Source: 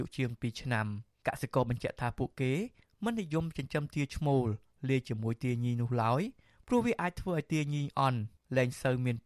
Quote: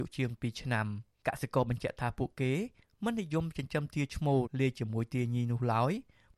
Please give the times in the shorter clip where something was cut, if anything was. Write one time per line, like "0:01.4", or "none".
0:04.4